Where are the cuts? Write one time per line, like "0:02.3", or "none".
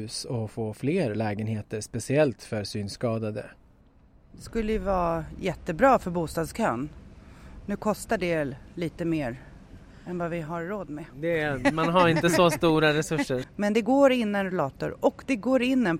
0:13.4